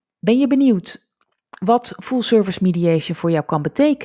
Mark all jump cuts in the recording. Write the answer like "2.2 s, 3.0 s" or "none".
none